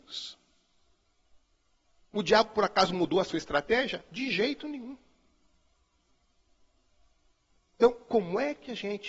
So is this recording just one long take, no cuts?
yes; 0 cuts

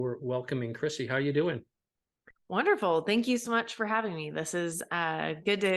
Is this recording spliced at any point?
no; 0 cuts

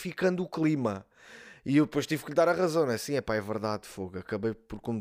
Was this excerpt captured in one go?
yes; 0 cuts

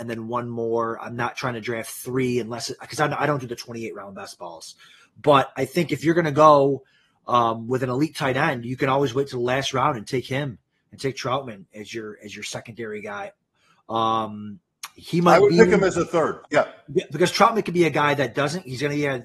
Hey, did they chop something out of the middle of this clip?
yes; 1 cut; at 16.4 s

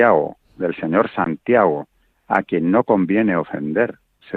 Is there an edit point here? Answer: no; 0 cuts

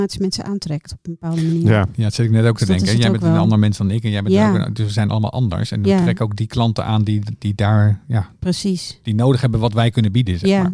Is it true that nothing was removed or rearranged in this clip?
yes; 0 cuts

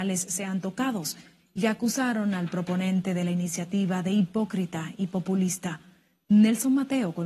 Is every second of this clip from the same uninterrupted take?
yes; 0 cuts

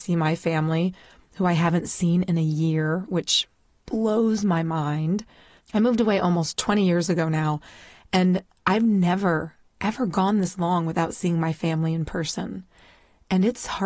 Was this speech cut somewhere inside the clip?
no; 0 cuts

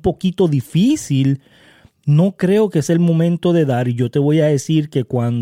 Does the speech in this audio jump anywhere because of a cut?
no; 0 cuts

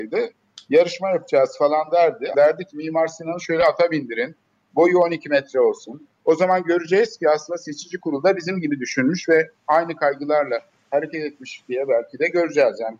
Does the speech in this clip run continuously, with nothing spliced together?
no; 3 cuts; at 2.3 s, 4.7 s, 6.1 s

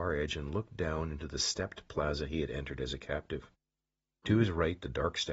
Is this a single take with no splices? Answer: yes; 0 cuts

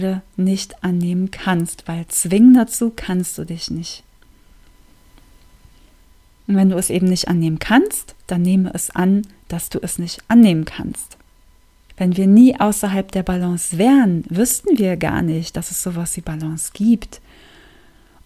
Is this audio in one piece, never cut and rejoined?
no; 1 cut; at 11.9 s

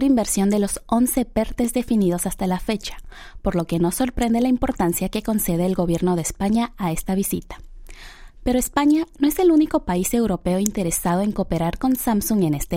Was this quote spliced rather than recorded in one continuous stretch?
no; 0 cuts

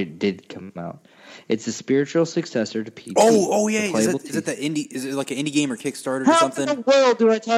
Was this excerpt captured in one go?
yes; 0 cuts

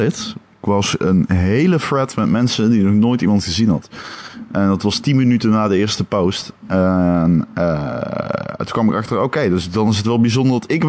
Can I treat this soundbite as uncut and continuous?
yes; 0 cuts

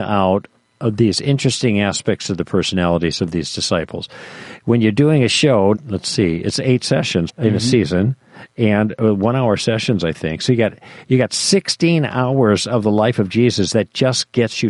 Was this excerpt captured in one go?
no; 2 cuts; at 5.7 s, 7.3 s

